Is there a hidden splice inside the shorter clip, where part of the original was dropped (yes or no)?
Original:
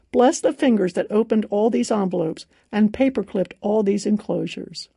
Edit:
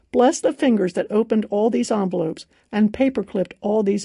no